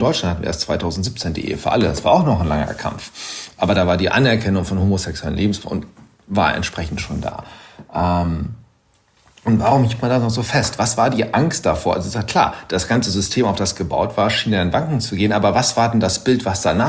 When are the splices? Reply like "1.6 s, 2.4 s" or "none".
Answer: none